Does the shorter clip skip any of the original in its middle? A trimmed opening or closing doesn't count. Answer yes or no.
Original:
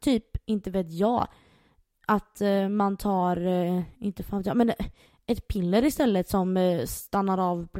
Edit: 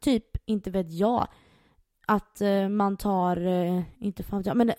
no